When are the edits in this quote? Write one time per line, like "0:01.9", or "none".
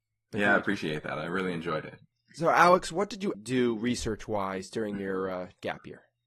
0:03.3